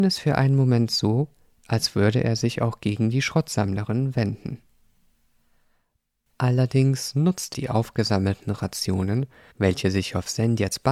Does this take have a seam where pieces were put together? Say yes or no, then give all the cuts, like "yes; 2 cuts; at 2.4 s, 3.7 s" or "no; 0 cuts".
yes; 2 cuts; at 7.5 s, 9.5 s